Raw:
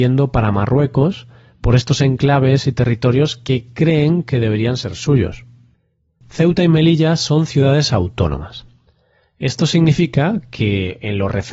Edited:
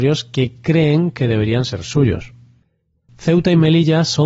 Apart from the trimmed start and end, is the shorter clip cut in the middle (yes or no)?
no